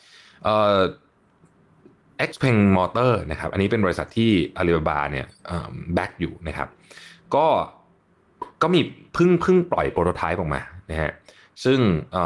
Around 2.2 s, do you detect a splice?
no; 0 cuts

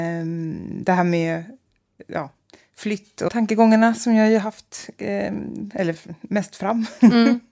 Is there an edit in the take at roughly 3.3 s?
yes; 2 cuts; at 3.3 s, 5.7 s

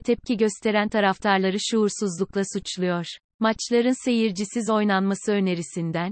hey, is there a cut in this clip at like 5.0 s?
no; 1 cut; at 3.3 s

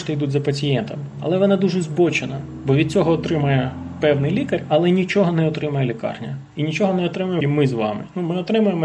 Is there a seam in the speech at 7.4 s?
yes; 1 cut; at 7.4 s

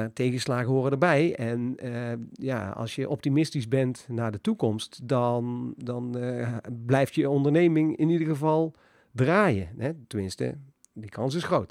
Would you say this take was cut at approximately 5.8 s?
yes; 1 cut; at 5.8 s

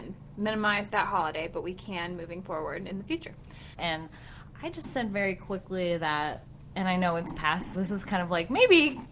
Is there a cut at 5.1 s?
no; 2 cuts; at 3.8 s, 7.7 s

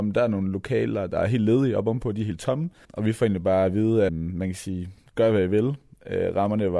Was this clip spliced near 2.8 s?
yes; 2 cuts; at 2.8 s, 4.1 s

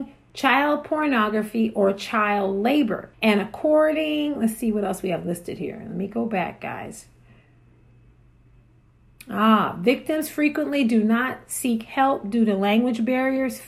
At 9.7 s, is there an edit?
no; 1 cut; at 3.1 s

